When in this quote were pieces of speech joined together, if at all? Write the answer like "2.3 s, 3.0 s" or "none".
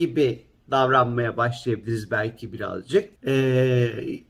3.2 s